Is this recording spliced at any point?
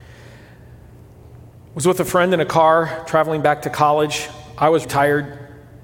yes; 1 cut; at 4.8 s

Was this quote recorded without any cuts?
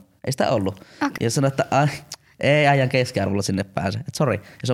no; 1 cut; at 1.2 s

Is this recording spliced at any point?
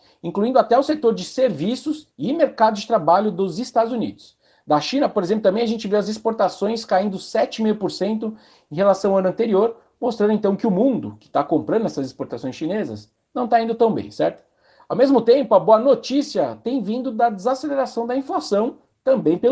no; 0 cuts

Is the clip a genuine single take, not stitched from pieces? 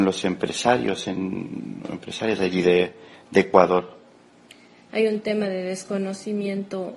no; 1 cut; at 4.9 s

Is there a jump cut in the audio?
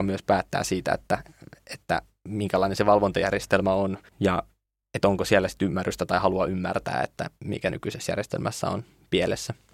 yes; 1 cut; at 4.1 s

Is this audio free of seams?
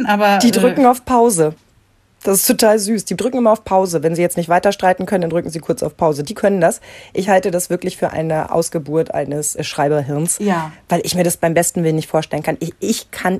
no; 1 cut; at 9.6 s

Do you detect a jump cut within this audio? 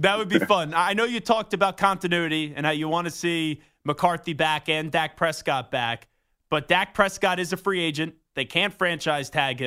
no; 0 cuts

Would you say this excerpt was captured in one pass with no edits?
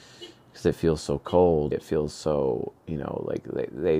no; 1 cut; at 1.7 s

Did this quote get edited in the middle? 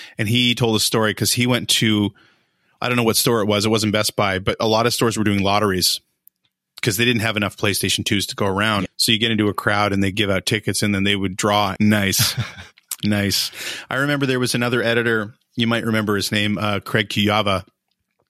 yes; 2 cuts; at 8.9 s, 11.8 s

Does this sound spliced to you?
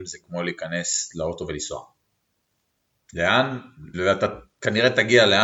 yes; 1 cut; at 3.9 s

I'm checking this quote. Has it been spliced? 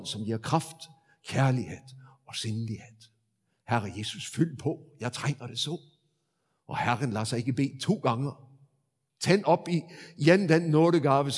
no; 0 cuts

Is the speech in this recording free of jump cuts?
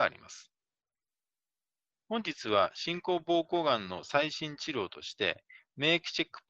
yes; 0 cuts

